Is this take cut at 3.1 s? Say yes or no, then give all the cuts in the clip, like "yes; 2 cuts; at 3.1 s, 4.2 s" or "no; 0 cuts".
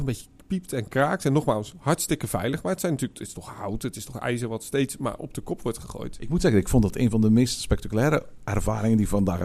no; 0 cuts